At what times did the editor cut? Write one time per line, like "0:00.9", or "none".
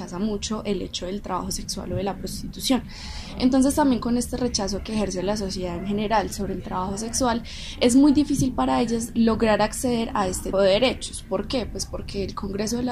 0:10.5